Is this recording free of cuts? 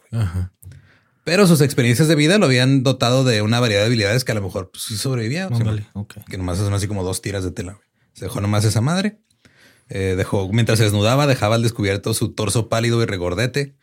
no; 1 cut; at 5.5 s

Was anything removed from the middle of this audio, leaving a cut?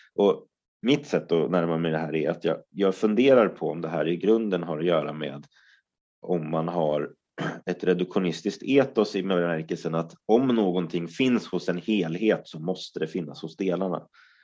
no; 0 cuts

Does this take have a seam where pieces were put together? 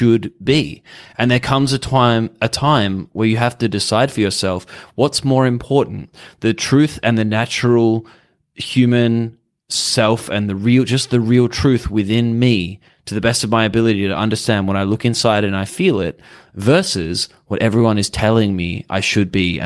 no; 0 cuts

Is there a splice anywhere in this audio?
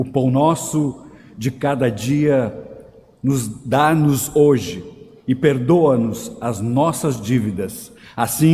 no; 0 cuts

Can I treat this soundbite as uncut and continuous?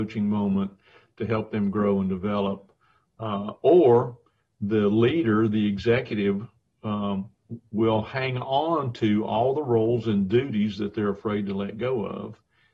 yes; 0 cuts

